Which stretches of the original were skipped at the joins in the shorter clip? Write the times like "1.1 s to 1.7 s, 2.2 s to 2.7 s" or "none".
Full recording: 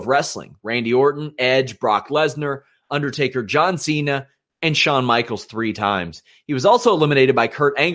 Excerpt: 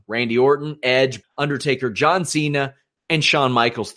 1.8 s to 2.8 s